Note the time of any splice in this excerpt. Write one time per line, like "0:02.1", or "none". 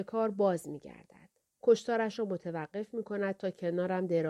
none